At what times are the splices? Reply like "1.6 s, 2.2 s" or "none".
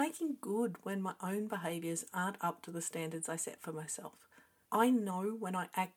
4.7 s